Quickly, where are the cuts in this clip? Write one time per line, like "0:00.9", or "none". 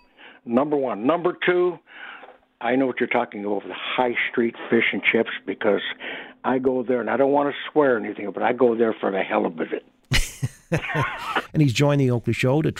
0:11.5